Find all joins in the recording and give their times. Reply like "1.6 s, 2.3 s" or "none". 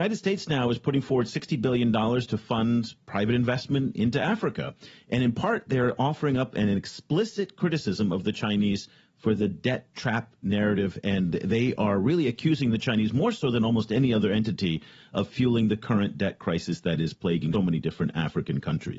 17.5 s